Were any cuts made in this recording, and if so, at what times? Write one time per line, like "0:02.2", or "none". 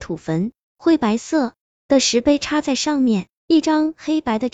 0:03.6